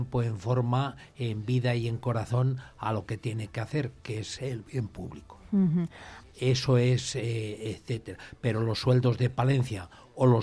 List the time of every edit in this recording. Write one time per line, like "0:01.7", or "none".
0:06.2

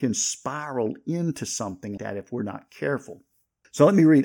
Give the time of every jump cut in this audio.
0:02.0

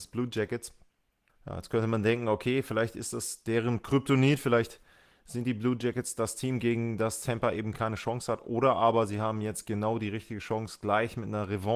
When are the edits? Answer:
0:01.3

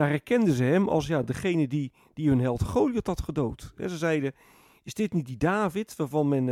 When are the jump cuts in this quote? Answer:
none

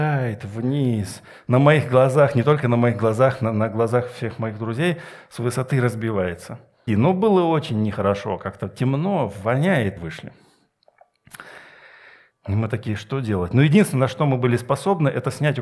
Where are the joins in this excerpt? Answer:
0:06.9
0:10.0
0:12.3

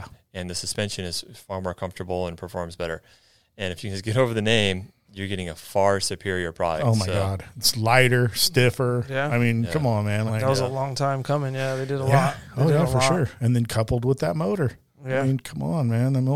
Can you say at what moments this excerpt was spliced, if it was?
0:10.3

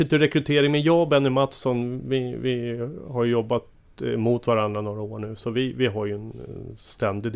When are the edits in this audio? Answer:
none

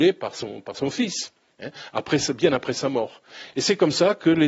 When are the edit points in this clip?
0:03.5

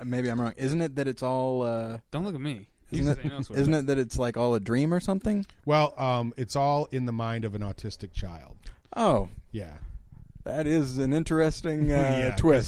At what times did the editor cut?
0:02.0

